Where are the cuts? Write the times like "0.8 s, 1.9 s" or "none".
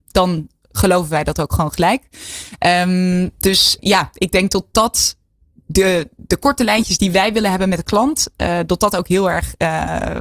3.8 s